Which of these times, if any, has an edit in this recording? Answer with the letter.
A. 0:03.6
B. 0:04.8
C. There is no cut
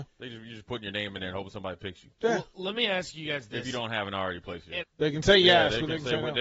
B